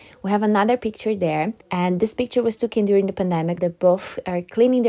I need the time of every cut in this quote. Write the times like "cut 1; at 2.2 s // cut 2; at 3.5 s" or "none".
cut 1; at 1.6 s // cut 2; at 3.6 s

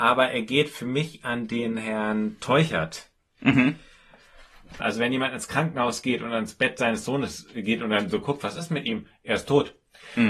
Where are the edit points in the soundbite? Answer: cut 1; at 4.8 s

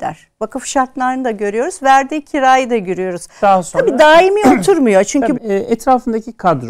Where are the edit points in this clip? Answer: cut 1; at 3.4 s // cut 2; at 5.3 s

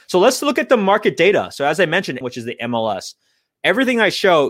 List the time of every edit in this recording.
cut 1; at 2.2 s

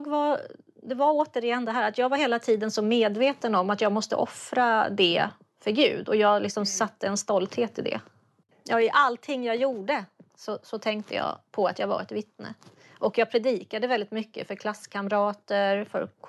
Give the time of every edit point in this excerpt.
cut 1; at 8.5 s

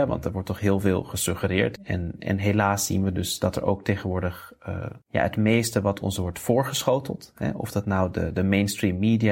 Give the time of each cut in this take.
cut 1; at 1.8 s // cut 2; at 5.0 s

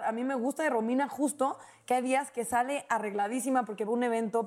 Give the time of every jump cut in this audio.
none

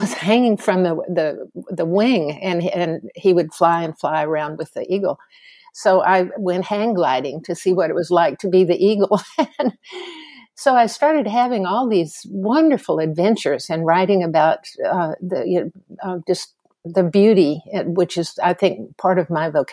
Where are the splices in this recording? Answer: none

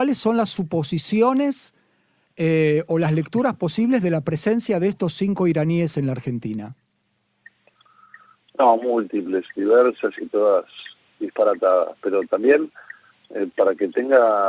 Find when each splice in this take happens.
none

